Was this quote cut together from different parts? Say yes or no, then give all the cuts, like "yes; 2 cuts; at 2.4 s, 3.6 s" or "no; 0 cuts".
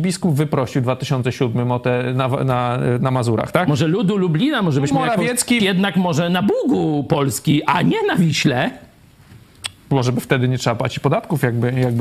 yes; 1 cut; at 5.6 s